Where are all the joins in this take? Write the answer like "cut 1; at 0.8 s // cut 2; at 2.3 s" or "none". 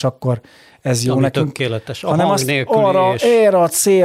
none